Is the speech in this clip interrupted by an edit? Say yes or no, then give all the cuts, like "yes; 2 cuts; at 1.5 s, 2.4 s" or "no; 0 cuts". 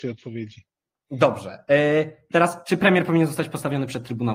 no; 0 cuts